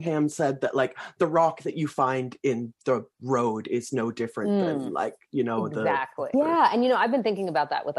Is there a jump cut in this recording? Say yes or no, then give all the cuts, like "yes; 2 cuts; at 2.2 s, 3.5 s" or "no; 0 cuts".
yes; 1 cut; at 6.3 s